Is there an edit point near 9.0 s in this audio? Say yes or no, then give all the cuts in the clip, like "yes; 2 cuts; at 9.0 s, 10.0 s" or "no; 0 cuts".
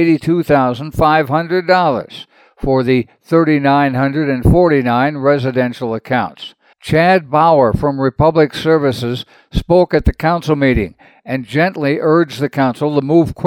no; 1 cut; at 6.7 s